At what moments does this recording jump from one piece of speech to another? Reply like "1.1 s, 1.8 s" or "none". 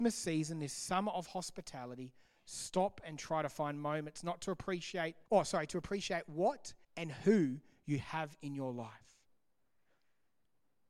5.3 s, 6.8 s

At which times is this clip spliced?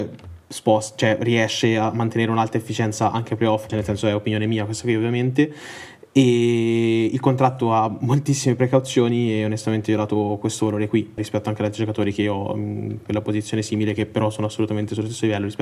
3.7 s, 11.2 s

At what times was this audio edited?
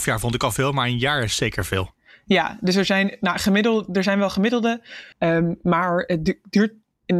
5.1 s

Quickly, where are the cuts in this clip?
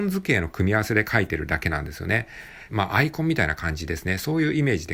2.7 s

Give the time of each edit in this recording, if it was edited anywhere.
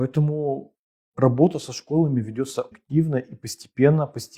2.7 s

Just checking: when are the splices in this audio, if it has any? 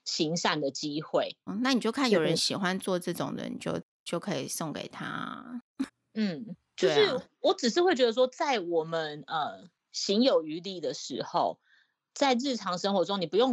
1.5 s, 5.9 s, 9.8 s

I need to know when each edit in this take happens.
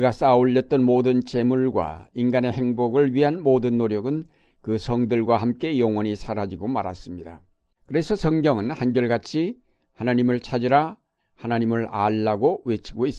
7.8 s, 11.2 s

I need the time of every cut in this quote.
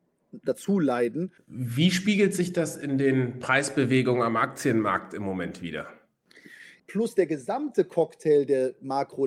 1.4 s, 6.8 s

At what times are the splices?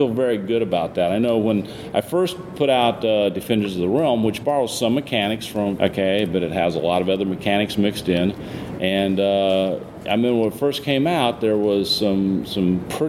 5.8 s

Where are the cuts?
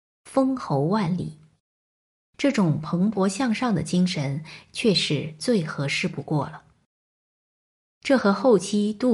4.7 s

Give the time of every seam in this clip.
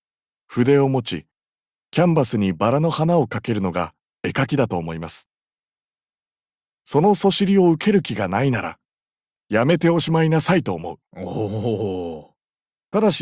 9.3 s, 11.0 s

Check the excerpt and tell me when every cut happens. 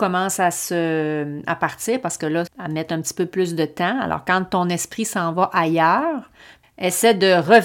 2.5 s, 6.6 s

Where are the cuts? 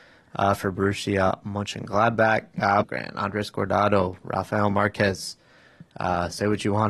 2.8 s

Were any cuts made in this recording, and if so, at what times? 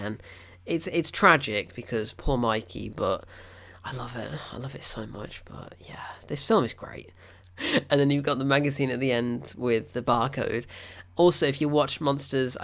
7.4 s

